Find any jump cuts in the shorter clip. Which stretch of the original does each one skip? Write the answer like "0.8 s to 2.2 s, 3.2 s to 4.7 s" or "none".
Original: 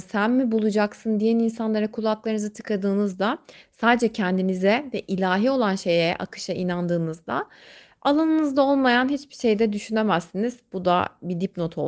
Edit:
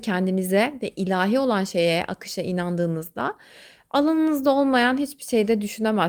none